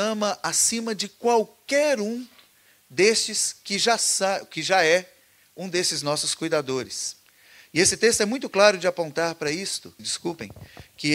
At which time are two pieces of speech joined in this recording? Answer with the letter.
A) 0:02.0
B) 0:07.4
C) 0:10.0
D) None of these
C